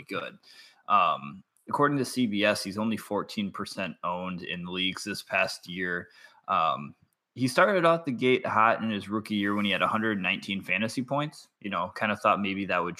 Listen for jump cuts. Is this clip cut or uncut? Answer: cut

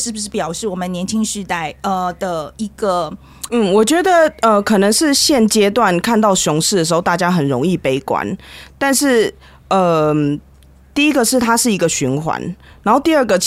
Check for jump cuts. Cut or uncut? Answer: cut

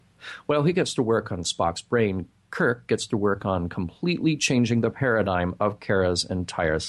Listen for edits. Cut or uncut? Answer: uncut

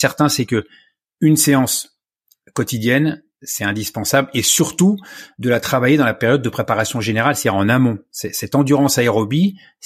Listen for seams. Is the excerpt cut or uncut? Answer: uncut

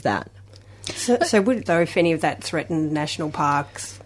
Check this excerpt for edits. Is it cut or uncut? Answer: cut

